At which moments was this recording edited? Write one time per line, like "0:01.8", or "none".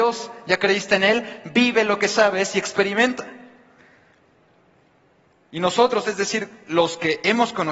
none